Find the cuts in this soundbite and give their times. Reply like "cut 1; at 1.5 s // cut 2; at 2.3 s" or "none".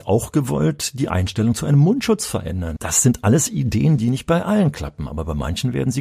cut 1; at 2.8 s // cut 2; at 4.0 s